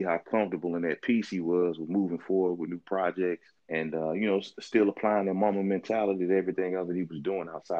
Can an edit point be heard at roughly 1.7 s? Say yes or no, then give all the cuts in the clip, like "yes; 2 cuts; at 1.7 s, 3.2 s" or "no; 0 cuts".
no; 1 cut; at 3.6 s